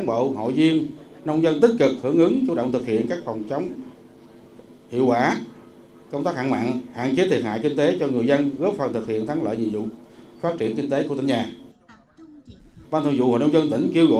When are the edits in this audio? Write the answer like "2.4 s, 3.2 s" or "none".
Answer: 12.8 s